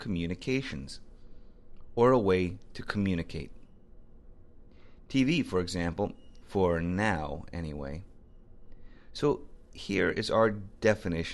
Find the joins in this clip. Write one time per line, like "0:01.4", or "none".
0:06.4